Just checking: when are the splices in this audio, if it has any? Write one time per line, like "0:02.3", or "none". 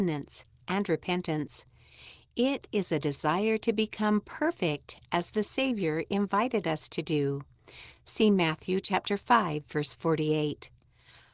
none